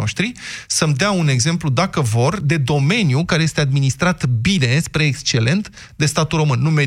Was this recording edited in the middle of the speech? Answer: no; 0 cuts

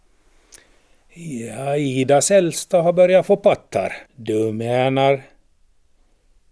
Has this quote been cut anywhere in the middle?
yes; 1 cut; at 4.1 s

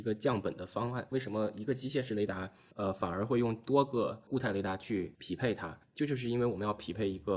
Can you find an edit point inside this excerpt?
yes; 1 cut; at 1.1 s

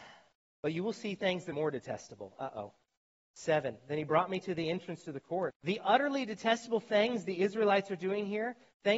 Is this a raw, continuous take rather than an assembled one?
no; 2 cuts; at 1.5 s, 5.5 s

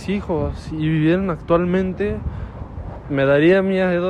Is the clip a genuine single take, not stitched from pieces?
no; 1 cut; at 3.0 s

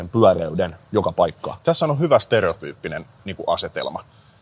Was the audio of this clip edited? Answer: no; 0 cuts

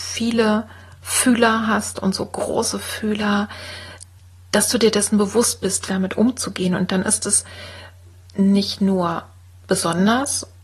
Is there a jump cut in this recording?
yes; 1 cut; at 5.9 s

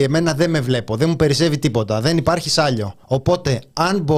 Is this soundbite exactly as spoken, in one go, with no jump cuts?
no; 1 cut; at 3.0 s

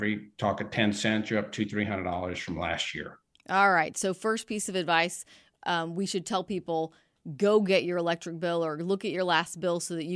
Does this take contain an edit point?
no; 0 cuts

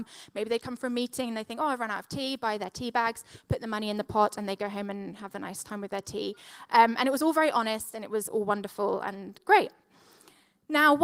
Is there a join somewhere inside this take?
no; 0 cuts

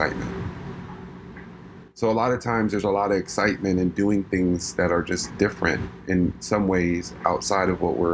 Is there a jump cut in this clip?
yes; 1 cut; at 1.9 s

